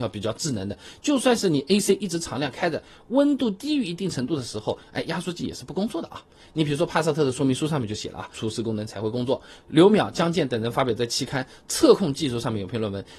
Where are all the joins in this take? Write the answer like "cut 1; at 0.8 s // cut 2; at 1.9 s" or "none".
cut 1; at 8.3 s // cut 2; at 9.6 s